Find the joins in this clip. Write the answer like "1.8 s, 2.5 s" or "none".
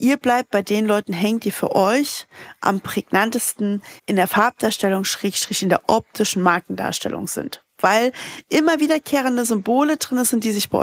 4.0 s